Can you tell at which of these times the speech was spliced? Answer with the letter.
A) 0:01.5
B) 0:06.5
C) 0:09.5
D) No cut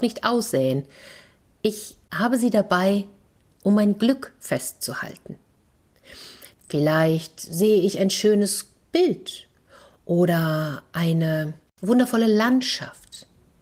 B